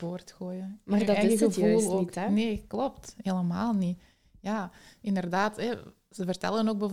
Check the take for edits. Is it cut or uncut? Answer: uncut